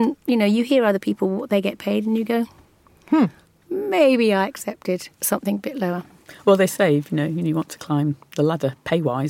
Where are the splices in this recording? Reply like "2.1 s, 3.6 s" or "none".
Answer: 3.6 s